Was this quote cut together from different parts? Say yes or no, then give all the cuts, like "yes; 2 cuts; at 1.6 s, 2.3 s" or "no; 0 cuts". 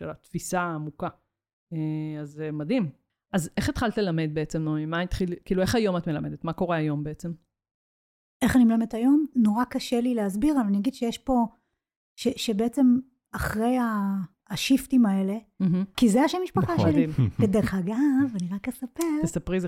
yes; 3 cuts; at 9.3 s, 14.3 s, 15.9 s